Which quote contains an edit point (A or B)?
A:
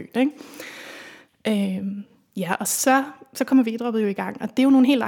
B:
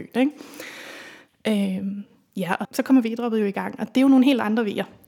B